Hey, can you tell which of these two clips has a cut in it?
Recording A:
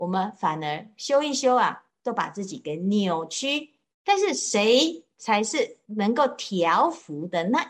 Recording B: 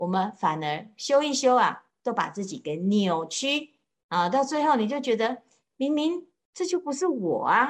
A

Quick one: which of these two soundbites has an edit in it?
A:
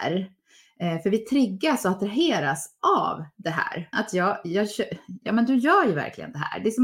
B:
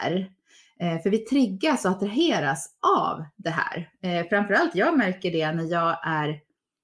A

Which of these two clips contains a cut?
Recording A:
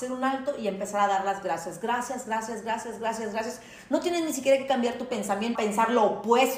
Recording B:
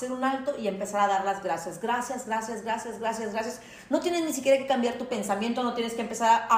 A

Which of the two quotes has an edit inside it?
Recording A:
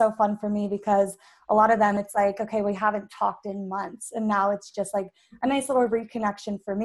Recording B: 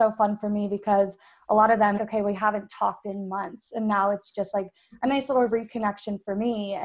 B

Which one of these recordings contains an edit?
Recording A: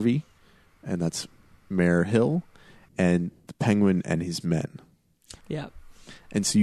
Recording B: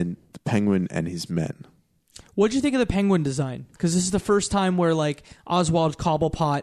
A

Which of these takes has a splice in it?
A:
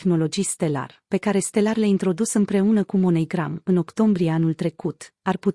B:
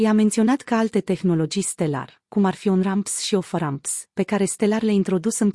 A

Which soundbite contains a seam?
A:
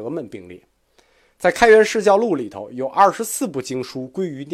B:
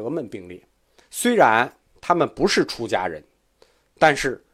B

